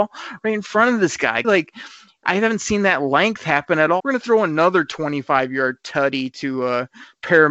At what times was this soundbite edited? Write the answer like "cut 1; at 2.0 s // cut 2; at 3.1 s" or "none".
cut 1; at 1.4 s // cut 2; at 4.0 s